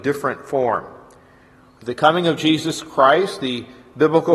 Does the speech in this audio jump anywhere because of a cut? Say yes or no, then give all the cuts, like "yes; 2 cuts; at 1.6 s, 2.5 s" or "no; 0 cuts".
no; 0 cuts